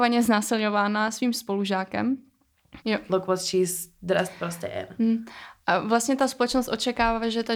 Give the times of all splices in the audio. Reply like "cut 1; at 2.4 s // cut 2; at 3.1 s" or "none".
cut 1; at 2.8 s